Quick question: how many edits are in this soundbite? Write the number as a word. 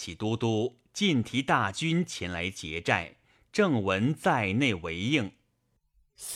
zero